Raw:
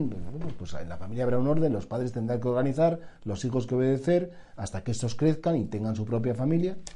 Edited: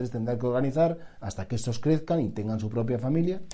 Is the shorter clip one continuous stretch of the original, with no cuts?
no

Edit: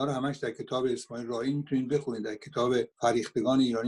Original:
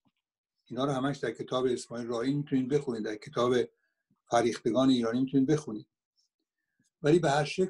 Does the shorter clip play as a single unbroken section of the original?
no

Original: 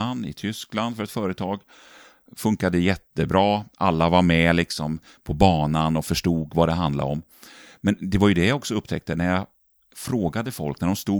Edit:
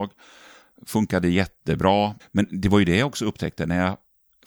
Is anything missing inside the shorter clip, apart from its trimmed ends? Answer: yes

